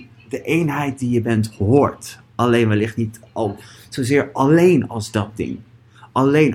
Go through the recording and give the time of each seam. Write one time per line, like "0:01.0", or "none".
0:03.2